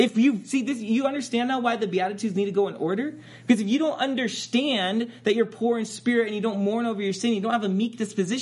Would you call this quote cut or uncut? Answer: uncut